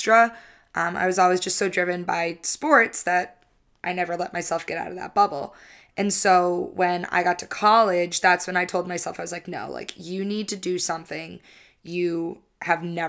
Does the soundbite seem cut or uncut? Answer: uncut